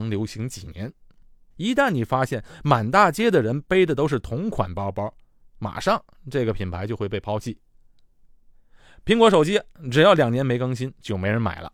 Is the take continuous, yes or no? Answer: yes